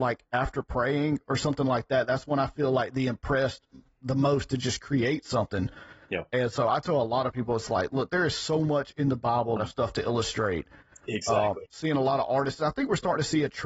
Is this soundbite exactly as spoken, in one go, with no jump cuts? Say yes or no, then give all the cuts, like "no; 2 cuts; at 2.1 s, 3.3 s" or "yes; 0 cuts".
no; 2 cuts; at 9.6 s, 11.7 s